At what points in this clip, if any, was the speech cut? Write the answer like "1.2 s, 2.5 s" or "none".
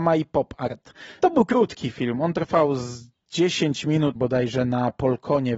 1.2 s, 4.2 s